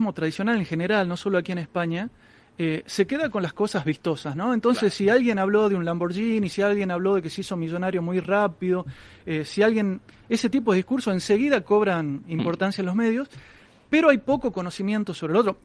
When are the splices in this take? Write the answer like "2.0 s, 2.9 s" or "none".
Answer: none